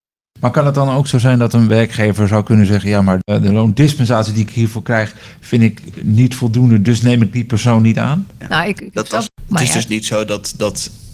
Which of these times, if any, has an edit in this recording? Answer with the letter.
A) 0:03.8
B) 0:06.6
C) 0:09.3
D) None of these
C